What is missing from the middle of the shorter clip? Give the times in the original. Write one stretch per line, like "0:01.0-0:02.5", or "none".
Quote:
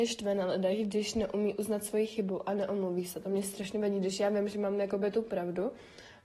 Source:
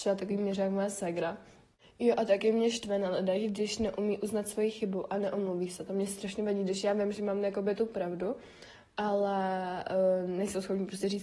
none

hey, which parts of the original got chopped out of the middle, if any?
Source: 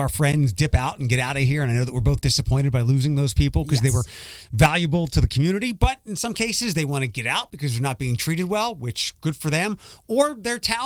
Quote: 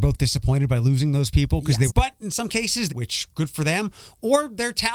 0:03.9-0:05.7
0:06.7-0:08.7

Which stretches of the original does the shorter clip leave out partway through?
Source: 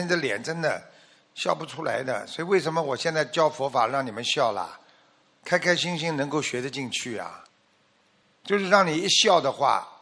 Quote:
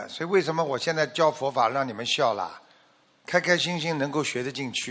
none

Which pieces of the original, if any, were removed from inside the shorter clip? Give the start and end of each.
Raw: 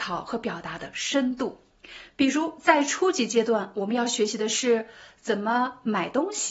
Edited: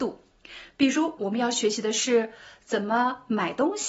0:02.6-0:03.7

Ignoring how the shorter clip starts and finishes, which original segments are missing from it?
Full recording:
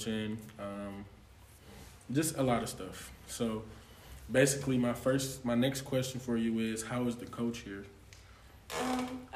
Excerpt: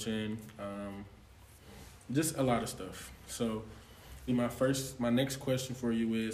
0:04.3-0:04.7

